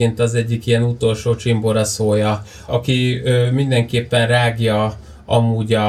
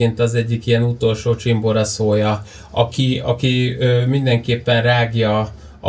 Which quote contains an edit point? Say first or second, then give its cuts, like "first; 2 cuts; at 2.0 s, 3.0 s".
first; 1 cut; at 2.7 s